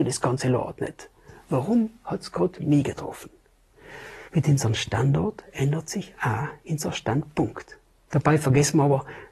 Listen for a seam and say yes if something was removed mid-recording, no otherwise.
yes